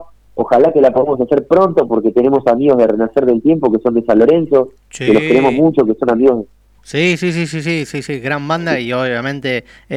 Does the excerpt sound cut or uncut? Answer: cut